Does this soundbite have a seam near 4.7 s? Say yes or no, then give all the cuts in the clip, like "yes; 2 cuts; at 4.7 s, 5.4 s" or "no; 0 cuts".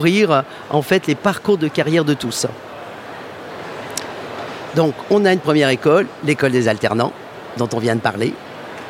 no; 0 cuts